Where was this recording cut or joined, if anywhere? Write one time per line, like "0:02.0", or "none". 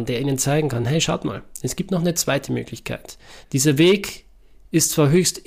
0:03.4